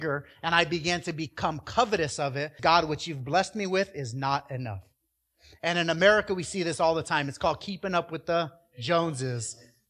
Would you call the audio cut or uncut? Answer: cut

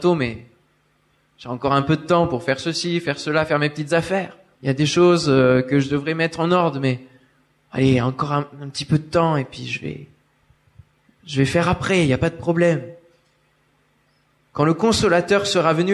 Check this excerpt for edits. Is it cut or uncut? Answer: cut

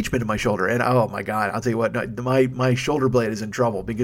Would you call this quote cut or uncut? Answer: uncut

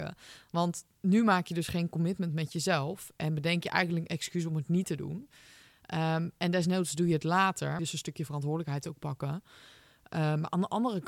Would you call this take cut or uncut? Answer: cut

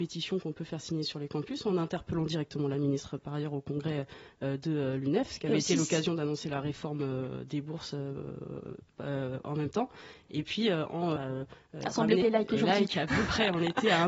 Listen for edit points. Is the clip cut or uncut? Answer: cut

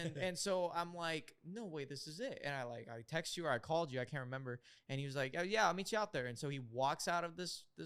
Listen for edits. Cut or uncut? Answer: uncut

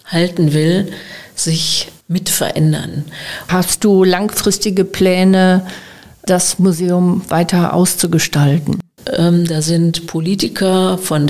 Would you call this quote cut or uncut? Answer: cut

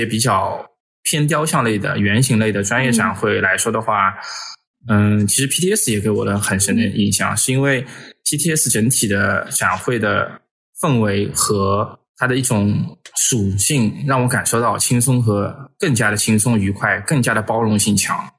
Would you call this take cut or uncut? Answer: uncut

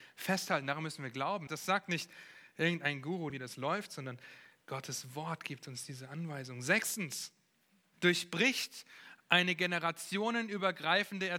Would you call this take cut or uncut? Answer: cut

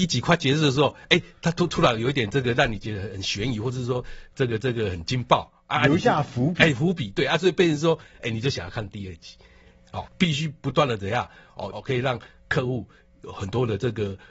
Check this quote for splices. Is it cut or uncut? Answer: cut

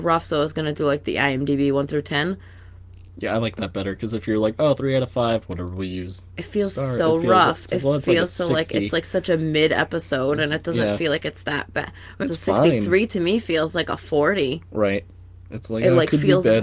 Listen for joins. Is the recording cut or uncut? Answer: cut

